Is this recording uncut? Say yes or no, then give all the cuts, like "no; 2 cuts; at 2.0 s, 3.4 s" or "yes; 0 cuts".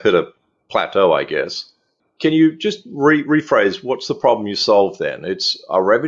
yes; 0 cuts